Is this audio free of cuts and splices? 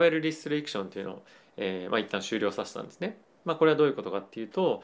yes; 0 cuts

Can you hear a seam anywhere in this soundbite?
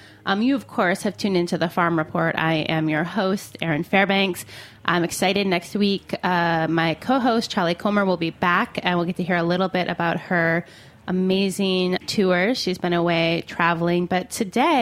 yes; 1 cut; at 12.0 s

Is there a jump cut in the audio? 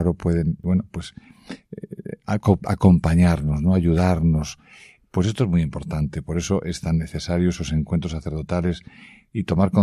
no; 0 cuts

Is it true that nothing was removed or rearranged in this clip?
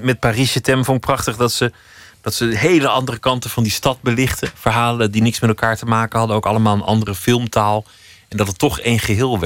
yes; 0 cuts

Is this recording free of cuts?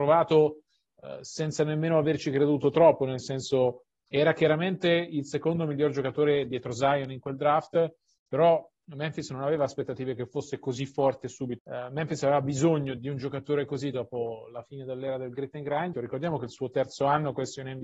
no; 3 cuts; at 11.6 s, 13.0 s, 15.9 s

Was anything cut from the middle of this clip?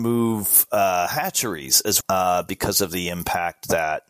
yes; 1 cut; at 2.0 s

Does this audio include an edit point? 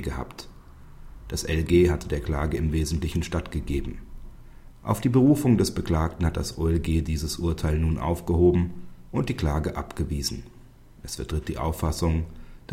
yes; 1 cut; at 4.7 s

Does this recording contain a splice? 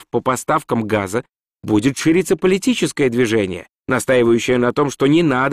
no; 0 cuts

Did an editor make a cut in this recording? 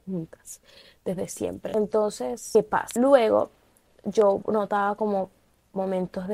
no; 0 cuts

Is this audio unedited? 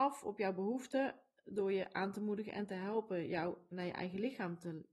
no; 1 cut; at 3.7 s

